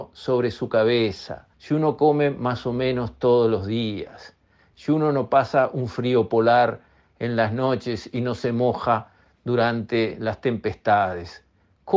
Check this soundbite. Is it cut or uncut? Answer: cut